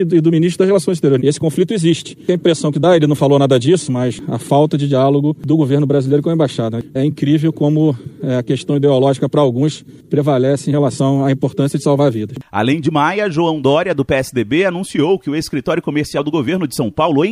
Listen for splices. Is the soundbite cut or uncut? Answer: cut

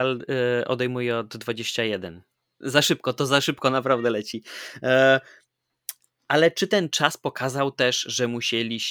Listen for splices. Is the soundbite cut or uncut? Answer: cut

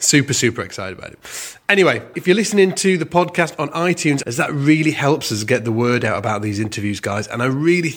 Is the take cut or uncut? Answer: cut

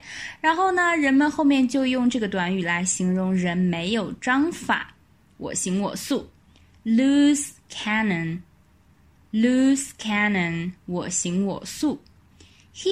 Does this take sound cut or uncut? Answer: uncut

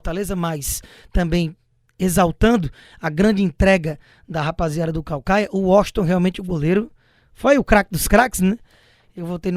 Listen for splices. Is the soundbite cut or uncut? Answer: uncut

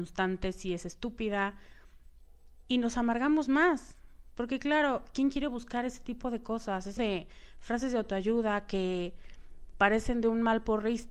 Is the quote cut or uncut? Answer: cut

